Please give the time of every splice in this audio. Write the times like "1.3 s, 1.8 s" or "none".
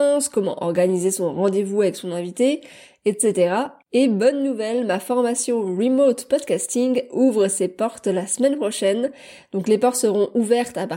none

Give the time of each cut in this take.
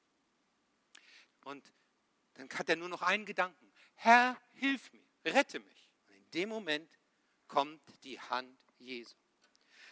1.3 s, 6.0 s

